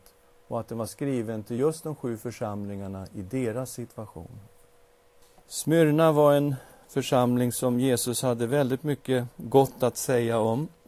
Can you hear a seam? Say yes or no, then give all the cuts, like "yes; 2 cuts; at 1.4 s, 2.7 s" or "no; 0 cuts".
no; 0 cuts